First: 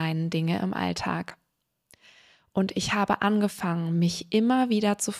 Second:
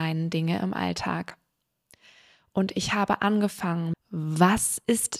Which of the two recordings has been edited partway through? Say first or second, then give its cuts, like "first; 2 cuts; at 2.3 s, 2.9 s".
second; 1 cut; at 3.9 s